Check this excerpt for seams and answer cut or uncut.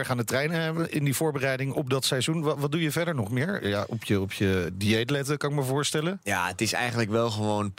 uncut